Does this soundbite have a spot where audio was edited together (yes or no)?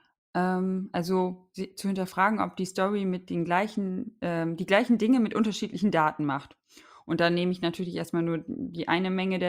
no